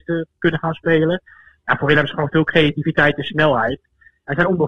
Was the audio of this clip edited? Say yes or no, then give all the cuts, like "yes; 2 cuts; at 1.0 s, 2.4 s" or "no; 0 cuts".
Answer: no; 0 cuts